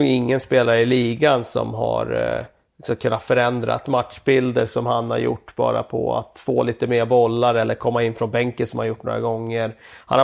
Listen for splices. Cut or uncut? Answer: uncut